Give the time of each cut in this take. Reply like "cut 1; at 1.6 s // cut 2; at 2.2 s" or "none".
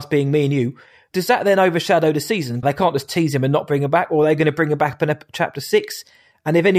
cut 1; at 1.1 s // cut 2; at 2.6 s